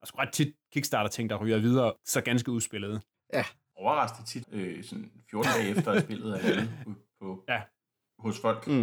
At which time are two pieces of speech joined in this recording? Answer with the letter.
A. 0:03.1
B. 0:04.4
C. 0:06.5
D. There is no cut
B